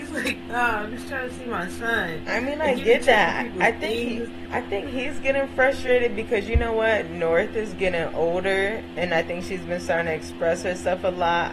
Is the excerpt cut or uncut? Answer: cut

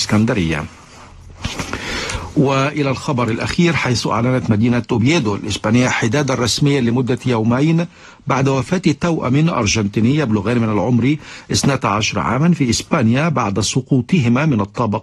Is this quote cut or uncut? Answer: uncut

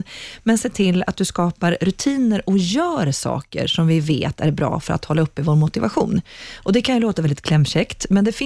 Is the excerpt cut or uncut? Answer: uncut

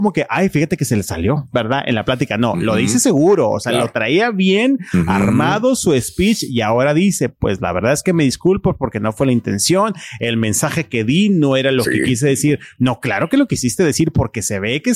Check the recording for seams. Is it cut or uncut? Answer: uncut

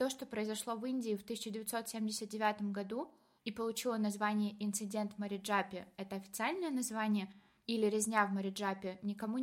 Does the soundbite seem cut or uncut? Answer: uncut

